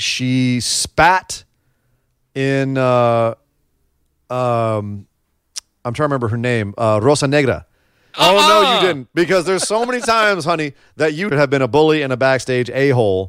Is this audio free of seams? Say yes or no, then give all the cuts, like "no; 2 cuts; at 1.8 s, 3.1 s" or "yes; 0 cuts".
no; 2 cuts; at 8.1 s, 11.3 s